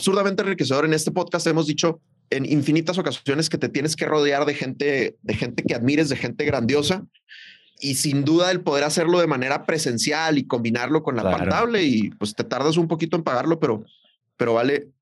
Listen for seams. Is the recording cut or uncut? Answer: cut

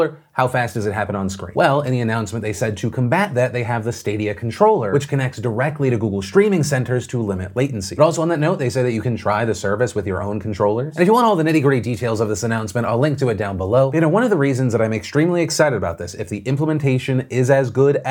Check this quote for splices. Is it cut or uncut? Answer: uncut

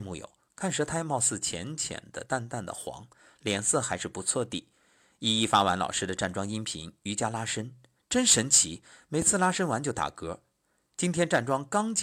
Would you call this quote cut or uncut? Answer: uncut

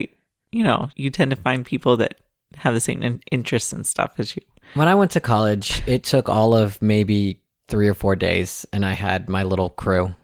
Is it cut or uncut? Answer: cut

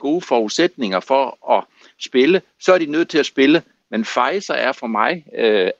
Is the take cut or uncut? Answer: uncut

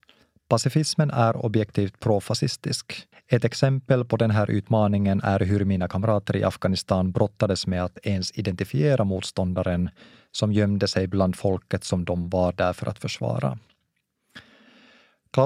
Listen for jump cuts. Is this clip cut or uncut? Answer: cut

